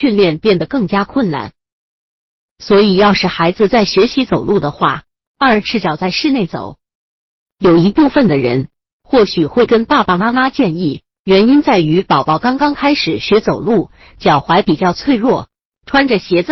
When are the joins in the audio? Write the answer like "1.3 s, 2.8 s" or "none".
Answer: 5.3 s, 11.1 s